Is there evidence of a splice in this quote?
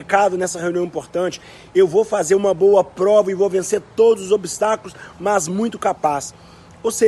yes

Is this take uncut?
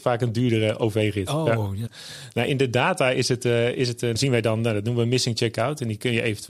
no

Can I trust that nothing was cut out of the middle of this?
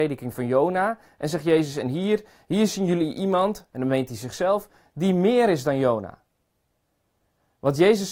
yes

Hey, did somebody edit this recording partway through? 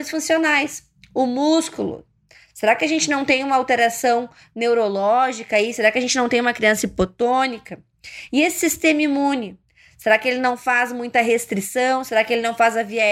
no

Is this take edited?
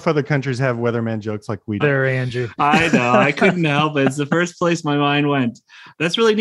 yes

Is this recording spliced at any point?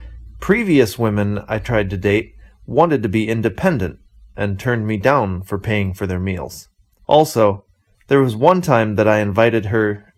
yes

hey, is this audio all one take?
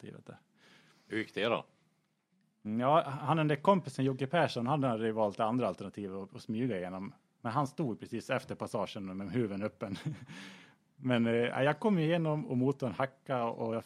yes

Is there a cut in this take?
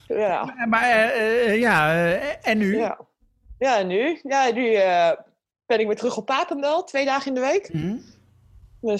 no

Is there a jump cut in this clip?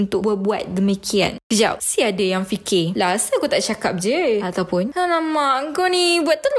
no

